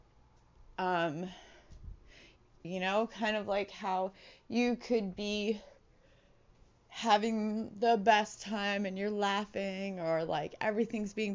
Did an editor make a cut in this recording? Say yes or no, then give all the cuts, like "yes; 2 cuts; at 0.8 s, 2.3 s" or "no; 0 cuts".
yes; 1 cut; at 2.6 s